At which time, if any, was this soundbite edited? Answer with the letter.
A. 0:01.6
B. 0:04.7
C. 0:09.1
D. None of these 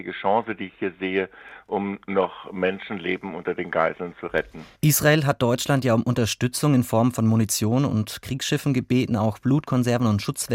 B